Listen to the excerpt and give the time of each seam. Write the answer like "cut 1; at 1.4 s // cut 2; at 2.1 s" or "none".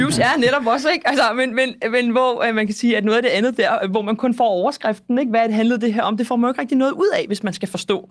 none